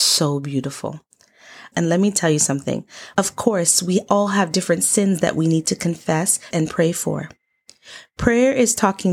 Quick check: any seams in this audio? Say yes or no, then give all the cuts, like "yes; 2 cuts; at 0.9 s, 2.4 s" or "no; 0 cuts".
yes; 3 cuts; at 1.7 s, 3.1 s, 6.5 s